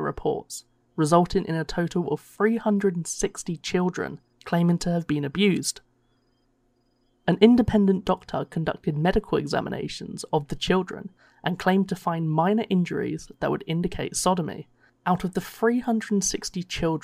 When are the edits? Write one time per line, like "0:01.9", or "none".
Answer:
0:14.9